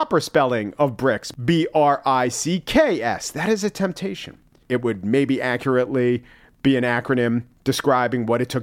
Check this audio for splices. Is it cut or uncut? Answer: cut